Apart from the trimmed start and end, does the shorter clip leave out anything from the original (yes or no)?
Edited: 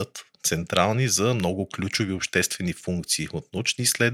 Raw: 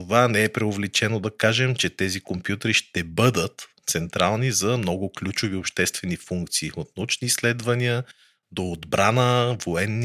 no